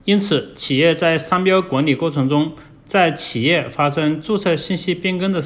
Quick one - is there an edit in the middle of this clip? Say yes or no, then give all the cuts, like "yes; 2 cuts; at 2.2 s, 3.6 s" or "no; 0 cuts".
no; 0 cuts